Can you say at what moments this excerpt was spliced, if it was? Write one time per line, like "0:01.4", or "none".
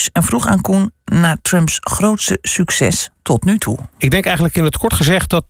none